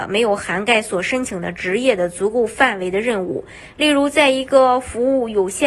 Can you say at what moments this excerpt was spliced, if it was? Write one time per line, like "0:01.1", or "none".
none